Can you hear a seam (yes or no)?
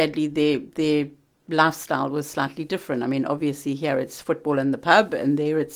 no